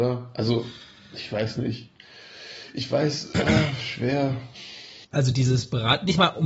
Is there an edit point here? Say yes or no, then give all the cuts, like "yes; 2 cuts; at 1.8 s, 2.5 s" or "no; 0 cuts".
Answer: yes; 1 cut; at 5.0 s